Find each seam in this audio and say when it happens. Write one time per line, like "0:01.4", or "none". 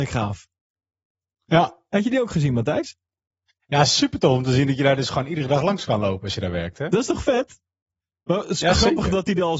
none